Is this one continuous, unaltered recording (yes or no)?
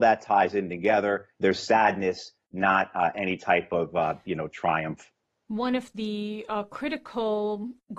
no